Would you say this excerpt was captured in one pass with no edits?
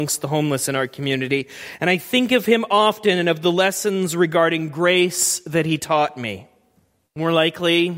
no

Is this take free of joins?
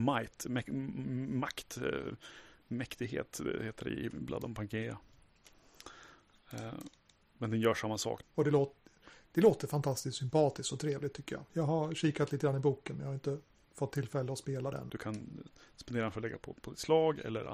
no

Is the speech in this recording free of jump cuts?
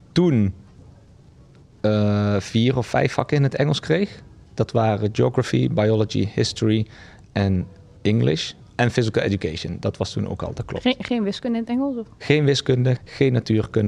no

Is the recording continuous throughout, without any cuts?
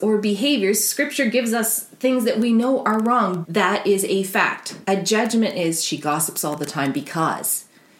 no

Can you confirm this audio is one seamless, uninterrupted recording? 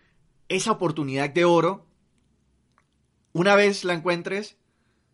yes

